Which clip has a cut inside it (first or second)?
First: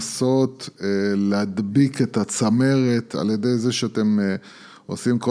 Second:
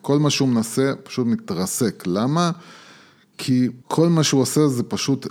second